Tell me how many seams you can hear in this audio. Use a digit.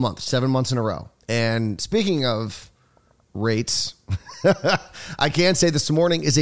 1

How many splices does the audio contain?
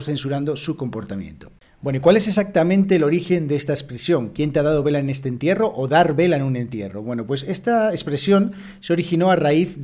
0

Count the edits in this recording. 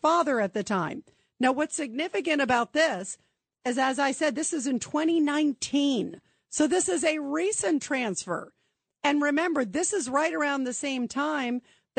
0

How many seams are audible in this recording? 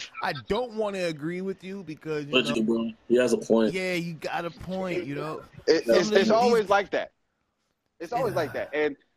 1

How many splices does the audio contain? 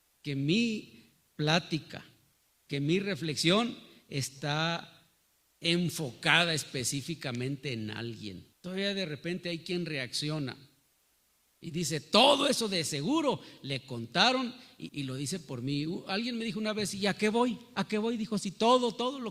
2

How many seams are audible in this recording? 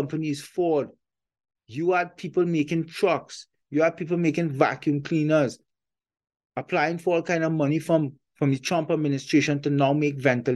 1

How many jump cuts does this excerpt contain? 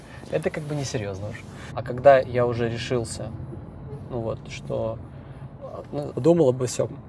2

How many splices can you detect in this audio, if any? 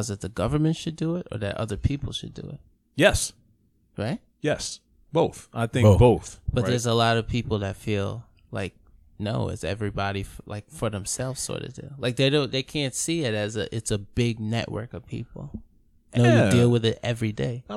2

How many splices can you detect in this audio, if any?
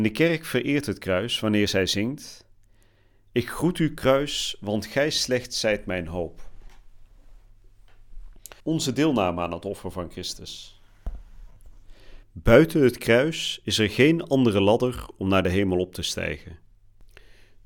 2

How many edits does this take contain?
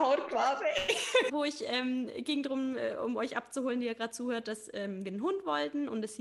1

